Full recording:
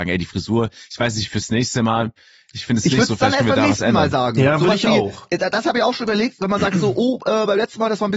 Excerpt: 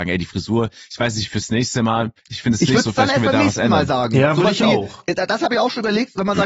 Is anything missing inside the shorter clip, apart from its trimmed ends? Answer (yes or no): yes